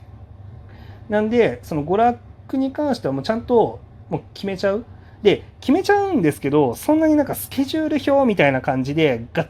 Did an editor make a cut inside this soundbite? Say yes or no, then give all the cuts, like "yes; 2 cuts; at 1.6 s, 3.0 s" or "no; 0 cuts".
no; 0 cuts